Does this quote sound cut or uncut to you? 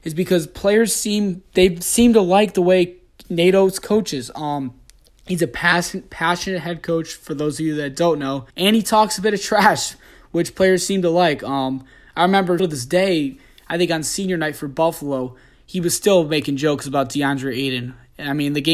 cut